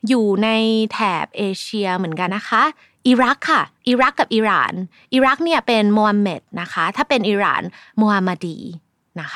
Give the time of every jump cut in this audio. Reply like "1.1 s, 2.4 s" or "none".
2.3 s, 3.8 s

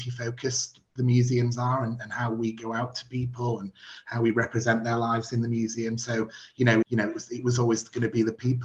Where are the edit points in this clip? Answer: 6.8 s

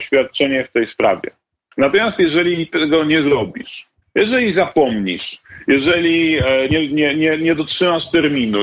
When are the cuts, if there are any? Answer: none

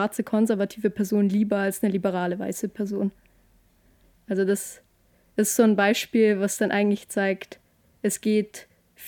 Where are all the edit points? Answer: none

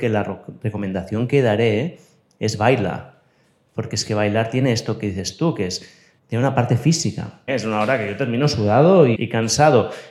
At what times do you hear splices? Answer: 6.2 s, 7.5 s, 9.1 s

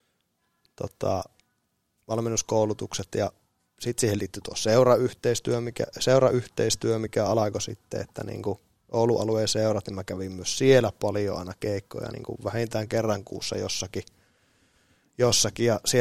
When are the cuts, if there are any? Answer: none

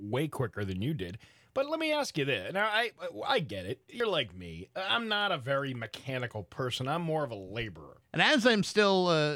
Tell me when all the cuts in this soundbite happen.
8.0 s

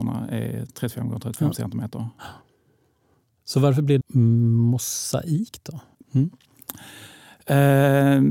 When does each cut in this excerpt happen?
4.0 s, 6.0 s

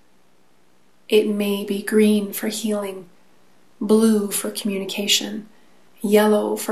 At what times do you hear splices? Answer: none

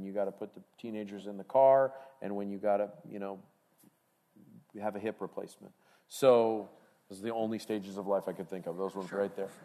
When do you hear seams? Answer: none

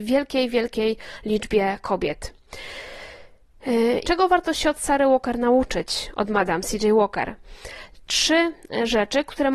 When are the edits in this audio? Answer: 4.0 s

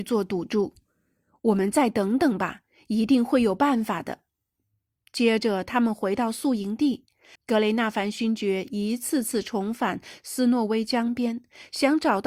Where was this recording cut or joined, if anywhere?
7.4 s

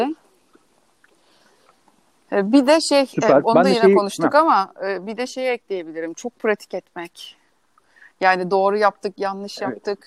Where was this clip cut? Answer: none

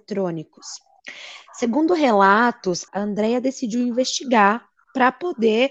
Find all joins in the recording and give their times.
2.9 s

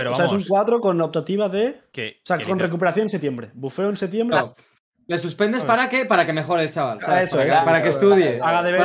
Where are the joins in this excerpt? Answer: 4.3 s

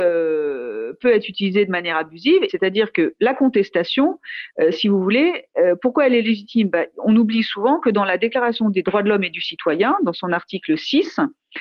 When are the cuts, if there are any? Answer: 2.5 s

